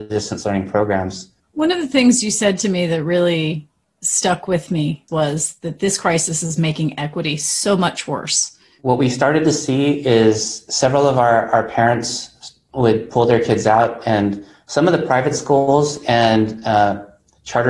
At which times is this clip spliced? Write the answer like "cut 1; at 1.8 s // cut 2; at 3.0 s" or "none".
cut 1; at 8.8 s